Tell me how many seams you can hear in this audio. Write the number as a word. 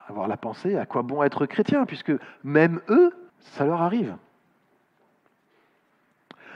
one